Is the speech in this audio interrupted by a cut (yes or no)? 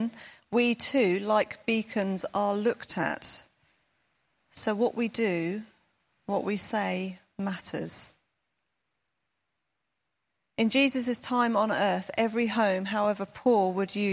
no